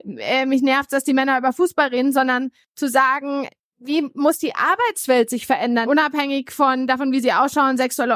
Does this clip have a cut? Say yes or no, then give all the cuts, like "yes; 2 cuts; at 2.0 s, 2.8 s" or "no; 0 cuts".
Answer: yes; 2 cuts; at 3.6 s, 5.9 s